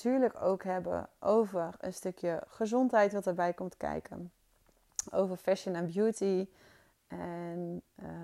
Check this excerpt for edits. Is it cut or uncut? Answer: uncut